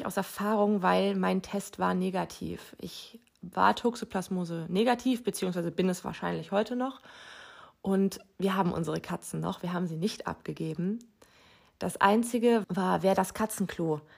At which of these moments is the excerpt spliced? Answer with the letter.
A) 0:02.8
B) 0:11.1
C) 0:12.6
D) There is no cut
C